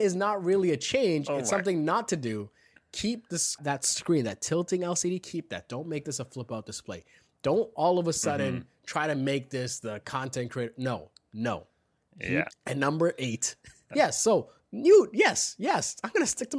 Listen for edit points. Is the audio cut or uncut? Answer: cut